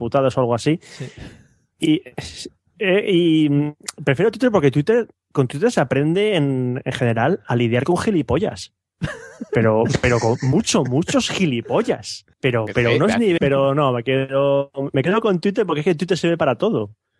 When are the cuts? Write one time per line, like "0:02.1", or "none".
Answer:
0:12.3
0:13.4